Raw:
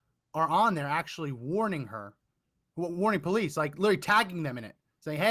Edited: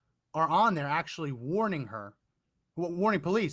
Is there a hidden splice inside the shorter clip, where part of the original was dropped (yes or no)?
no